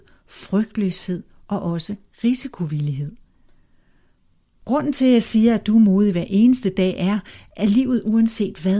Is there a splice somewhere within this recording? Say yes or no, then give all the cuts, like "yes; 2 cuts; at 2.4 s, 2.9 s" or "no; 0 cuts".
no; 0 cuts